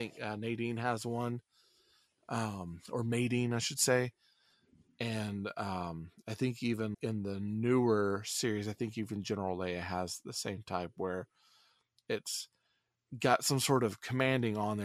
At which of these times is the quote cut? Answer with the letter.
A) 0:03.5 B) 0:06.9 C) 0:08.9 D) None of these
B